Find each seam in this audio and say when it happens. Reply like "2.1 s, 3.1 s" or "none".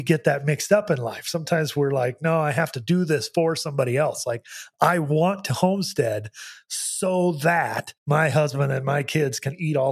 8.0 s